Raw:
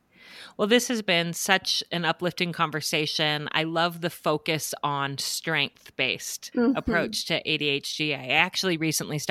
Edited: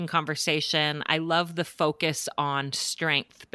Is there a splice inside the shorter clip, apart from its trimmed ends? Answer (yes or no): no